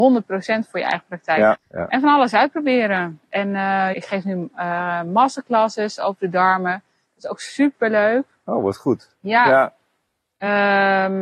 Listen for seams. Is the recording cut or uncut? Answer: cut